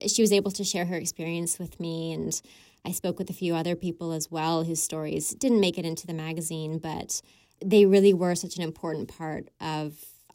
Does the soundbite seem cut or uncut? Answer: uncut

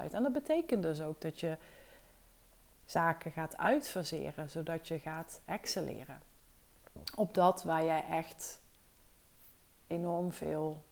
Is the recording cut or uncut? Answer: uncut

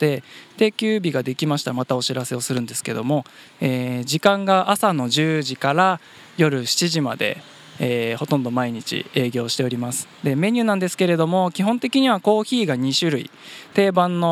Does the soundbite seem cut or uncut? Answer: uncut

